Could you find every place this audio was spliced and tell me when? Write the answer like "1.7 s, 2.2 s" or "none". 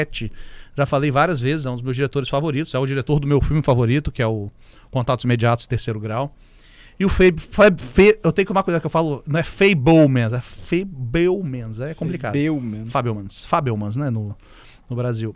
none